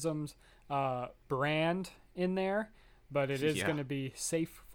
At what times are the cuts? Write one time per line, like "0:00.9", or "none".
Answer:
none